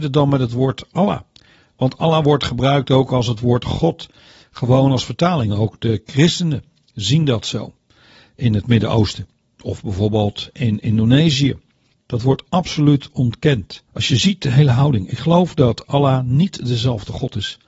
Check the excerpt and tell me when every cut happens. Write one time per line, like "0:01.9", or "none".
0:11.9
0:13.9